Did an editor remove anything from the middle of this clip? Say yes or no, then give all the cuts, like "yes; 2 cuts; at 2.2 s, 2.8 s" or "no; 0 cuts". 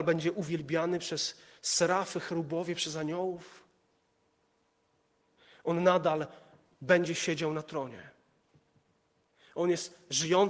no; 0 cuts